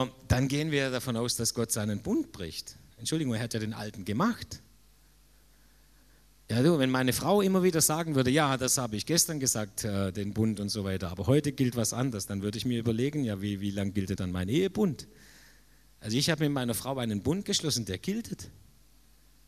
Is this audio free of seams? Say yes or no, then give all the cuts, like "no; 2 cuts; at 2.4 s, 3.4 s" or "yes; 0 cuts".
no; 1 cut; at 14.2 s